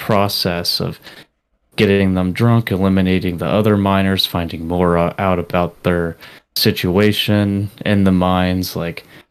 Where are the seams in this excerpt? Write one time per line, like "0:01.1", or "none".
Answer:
none

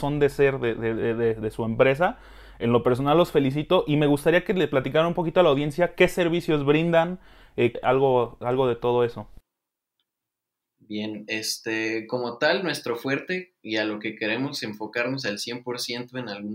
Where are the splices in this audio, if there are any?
0:07.7

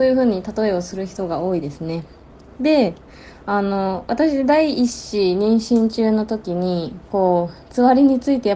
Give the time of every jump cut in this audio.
none

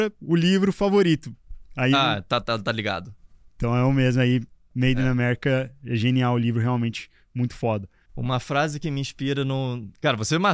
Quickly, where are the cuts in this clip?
0:02.4
0:08.0

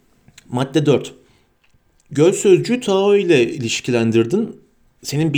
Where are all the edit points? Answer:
none

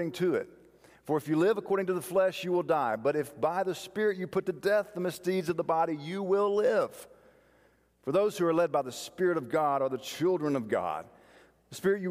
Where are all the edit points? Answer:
none

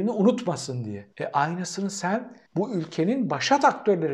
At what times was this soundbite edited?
0:01.1
0:02.5

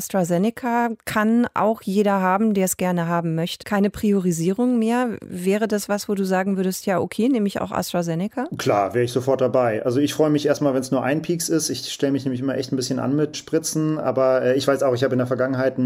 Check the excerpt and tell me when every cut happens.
0:03.6

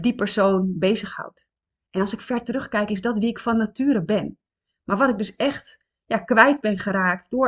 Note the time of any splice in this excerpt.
none

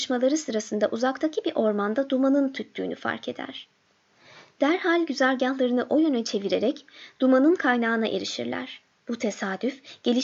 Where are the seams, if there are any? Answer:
0:09.0

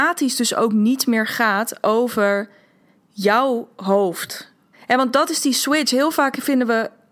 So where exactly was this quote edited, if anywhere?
0:04.7

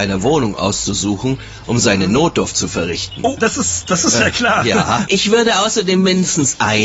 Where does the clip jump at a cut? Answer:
0:03.4
0:05.1

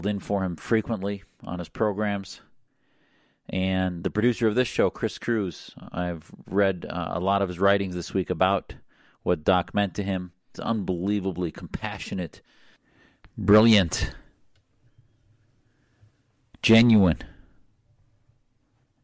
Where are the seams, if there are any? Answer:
0:10.5

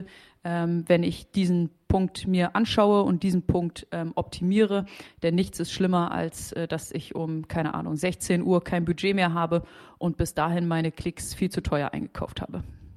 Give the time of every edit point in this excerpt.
none

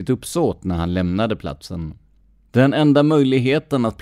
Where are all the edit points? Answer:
0:02.5

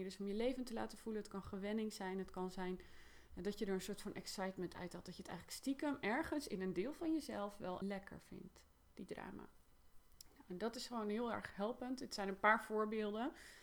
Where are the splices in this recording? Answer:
0:07.8

